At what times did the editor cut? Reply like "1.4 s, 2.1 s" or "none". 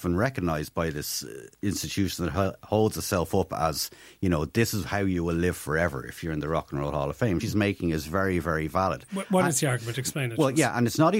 7.4 s